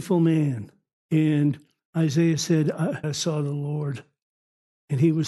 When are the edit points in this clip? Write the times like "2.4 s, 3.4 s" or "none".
1.0 s, 3.0 s